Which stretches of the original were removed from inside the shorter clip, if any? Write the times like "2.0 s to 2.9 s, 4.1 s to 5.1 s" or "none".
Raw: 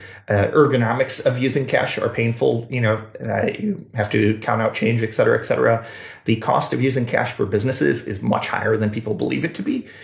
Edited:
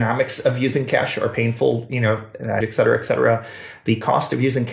3.4 s to 5.0 s